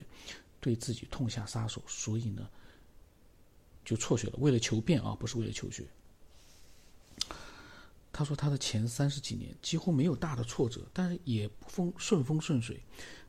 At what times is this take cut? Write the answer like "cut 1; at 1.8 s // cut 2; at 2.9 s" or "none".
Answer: cut 1; at 3.8 s